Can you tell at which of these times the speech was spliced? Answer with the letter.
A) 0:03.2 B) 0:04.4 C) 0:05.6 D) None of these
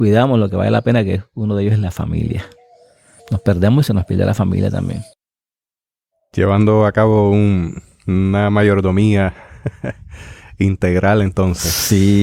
A